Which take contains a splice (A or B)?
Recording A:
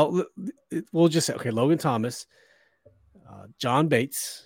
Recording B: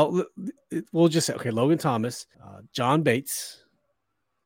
B